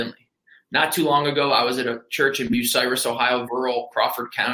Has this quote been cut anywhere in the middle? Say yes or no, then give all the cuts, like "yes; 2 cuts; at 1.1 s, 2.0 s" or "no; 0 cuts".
yes; 1 cut; at 3.5 s